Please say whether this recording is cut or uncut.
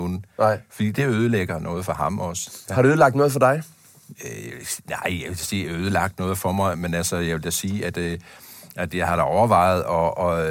uncut